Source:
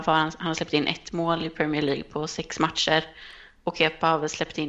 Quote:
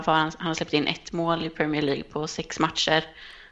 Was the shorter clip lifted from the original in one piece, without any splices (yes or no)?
yes